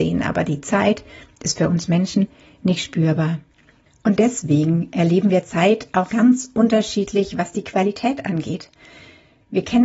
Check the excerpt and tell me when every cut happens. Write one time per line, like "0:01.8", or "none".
0:06.1